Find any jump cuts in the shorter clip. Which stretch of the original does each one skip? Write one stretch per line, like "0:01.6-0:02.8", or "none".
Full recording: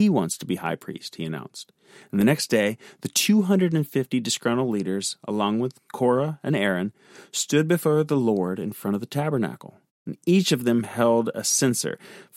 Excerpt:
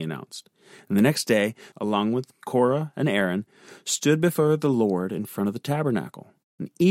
0:02.9-0:05.2